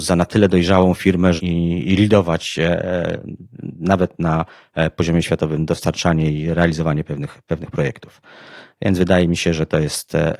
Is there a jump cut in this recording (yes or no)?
yes